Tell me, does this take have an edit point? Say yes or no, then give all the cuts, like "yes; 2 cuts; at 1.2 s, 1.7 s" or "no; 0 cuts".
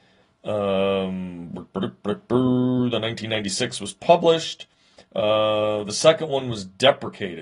no; 0 cuts